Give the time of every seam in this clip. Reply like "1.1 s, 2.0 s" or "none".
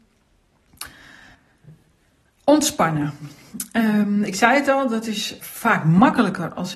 5.4 s